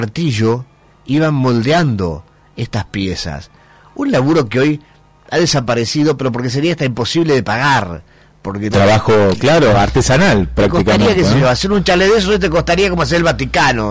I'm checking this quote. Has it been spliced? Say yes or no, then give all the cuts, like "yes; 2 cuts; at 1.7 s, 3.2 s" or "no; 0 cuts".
yes; 1 cut; at 8.7 s